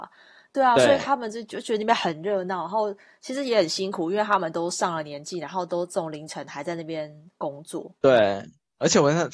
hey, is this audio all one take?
no; 1 cut; at 8.0 s

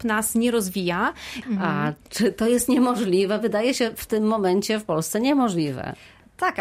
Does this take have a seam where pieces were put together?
yes; 1 cut; at 1.4 s

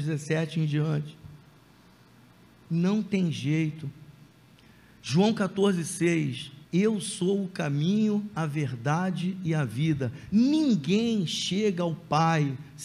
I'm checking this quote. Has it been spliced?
yes; 1 cut; at 6.6 s

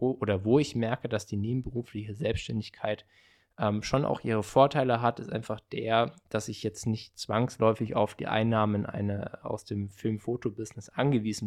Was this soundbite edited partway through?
no; 0 cuts

